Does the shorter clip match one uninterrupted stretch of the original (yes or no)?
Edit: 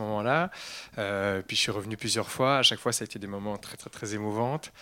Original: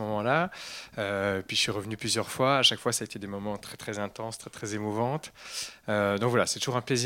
no